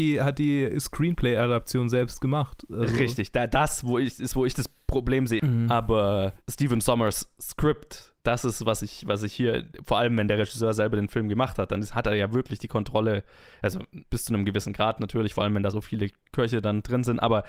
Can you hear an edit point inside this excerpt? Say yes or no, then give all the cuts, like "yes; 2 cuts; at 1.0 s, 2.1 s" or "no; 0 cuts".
yes; 1 cut; at 5.4 s